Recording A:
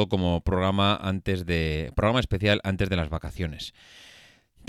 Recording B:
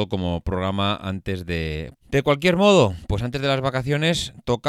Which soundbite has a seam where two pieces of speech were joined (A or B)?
B